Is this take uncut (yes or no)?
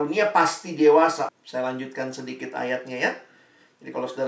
no